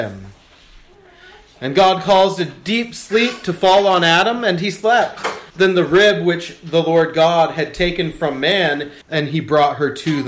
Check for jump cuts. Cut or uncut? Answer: cut